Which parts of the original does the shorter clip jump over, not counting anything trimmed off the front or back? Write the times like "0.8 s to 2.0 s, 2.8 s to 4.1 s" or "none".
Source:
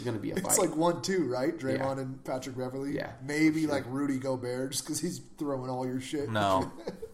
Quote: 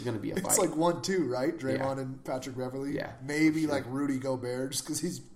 none